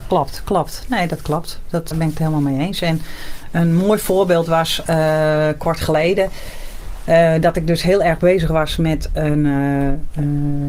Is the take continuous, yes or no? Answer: no